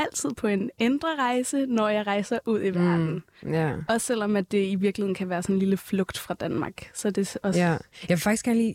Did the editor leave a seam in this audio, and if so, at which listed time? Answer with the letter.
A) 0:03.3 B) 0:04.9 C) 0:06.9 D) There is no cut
D